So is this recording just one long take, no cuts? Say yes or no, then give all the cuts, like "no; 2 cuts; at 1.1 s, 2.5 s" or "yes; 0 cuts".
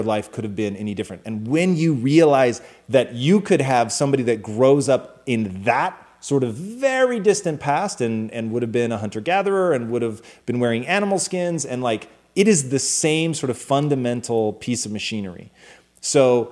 yes; 0 cuts